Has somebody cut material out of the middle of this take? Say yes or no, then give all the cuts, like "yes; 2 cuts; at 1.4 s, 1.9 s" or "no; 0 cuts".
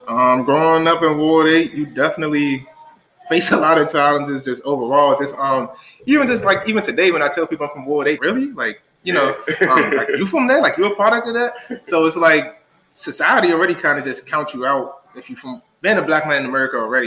yes; 1 cut; at 8.2 s